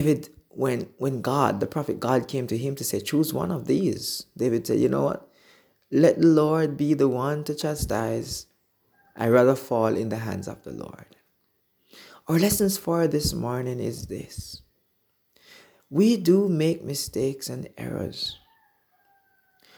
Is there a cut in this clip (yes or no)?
no